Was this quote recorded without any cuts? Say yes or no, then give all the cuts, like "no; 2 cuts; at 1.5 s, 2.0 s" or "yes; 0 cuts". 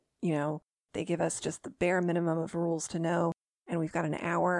yes; 0 cuts